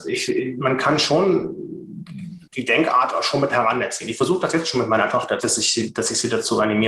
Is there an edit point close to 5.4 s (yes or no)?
yes